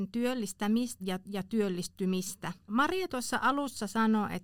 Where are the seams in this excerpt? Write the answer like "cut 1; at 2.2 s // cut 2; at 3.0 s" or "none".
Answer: cut 1; at 1.0 s // cut 2; at 2.7 s